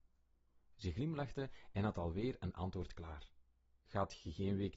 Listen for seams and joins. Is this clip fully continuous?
yes; 0 cuts

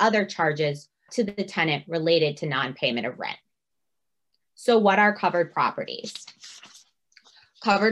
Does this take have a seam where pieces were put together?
yes; 1 cut; at 1.1 s

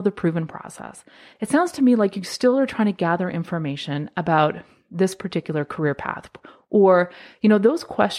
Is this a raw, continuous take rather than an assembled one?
no; 1 cut; at 1.3 s

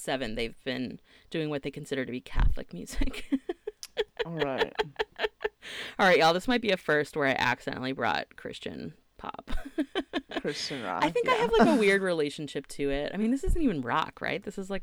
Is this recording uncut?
yes; 0 cuts

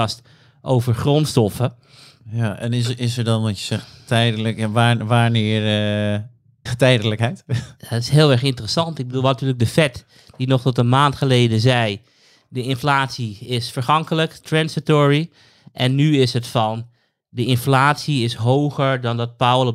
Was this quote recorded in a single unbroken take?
no; 1 cut; at 6.7 s

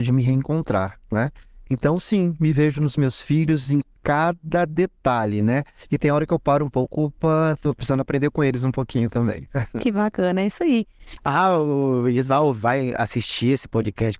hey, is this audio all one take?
no; 1 cut; at 11.2 s

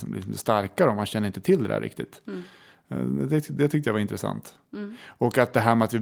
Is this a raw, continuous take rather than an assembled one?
yes; 0 cuts

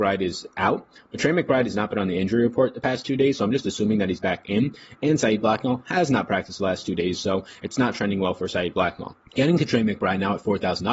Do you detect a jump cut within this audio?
yes; 1 cut; at 9.2 s

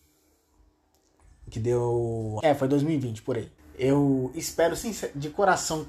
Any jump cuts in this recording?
yes; 2 cuts; at 2.4 s, 3.6 s

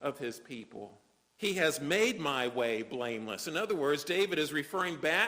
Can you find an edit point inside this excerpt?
yes; 1 cut; at 1.4 s

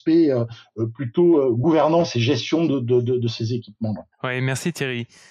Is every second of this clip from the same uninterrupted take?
no; 1 cut; at 4.1 s

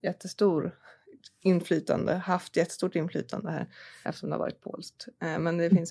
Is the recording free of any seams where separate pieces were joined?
no; 1 cut; at 4.0 s

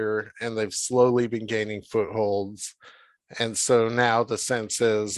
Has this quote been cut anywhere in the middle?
no; 0 cuts

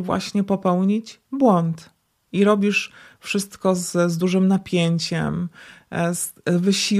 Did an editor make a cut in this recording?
no; 0 cuts

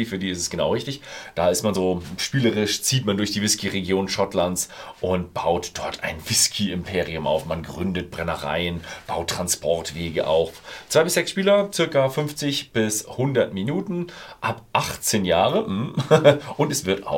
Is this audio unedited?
yes; 0 cuts

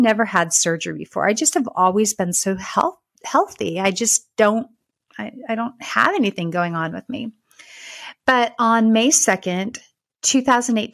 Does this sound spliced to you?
no; 0 cuts

